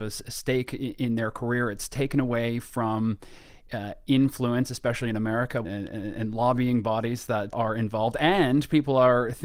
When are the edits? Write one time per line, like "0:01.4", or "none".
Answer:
0:05.6
0:07.5